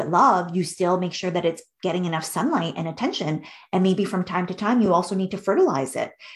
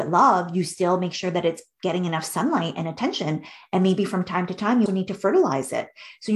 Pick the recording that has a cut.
second; 1 cut; at 4.9 s

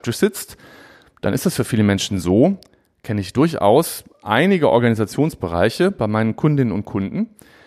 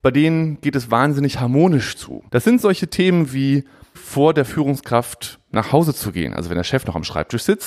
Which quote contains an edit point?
second; 2 cuts; at 2.3 s, 3.9 s

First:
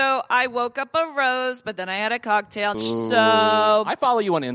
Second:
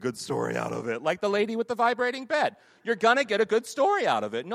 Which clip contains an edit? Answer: first; 1 cut; at 2.7 s

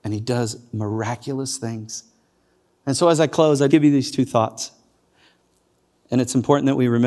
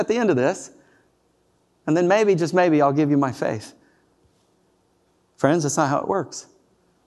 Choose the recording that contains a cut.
first; 1 cut; at 3.7 s

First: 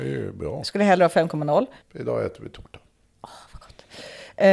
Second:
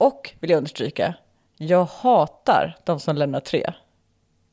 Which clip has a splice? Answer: first; 1 cut; at 1.8 s

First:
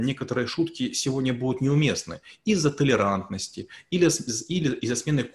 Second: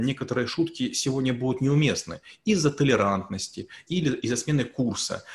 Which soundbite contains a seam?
second; 1 cut; at 3.9 s

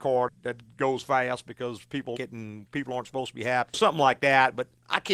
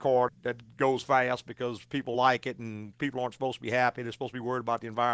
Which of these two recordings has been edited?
first; 2 cuts; at 2.1 s, 3.7 s

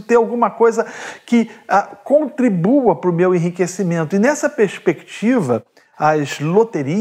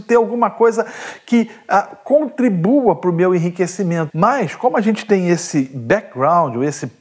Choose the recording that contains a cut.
second; 1 cut; at 4.1 s

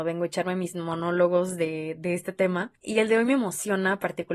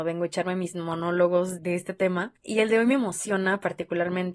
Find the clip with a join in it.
second; 1 cut; at 1.6 s

